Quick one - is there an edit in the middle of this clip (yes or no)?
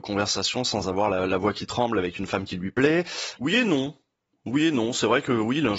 yes